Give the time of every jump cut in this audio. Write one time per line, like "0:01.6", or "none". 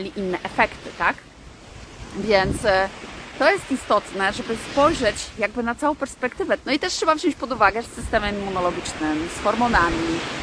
0:06.6
0:07.8